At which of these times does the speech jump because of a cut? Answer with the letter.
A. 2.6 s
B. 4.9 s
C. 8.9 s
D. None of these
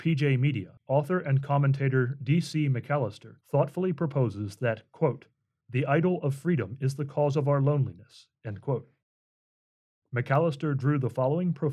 D